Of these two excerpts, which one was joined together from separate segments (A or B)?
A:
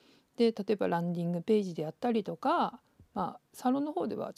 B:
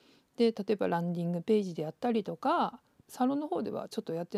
B